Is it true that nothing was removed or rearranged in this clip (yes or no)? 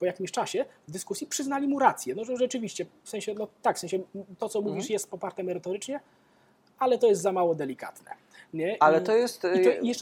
yes